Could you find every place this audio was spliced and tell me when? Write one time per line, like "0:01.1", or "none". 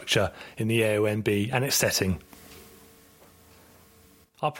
none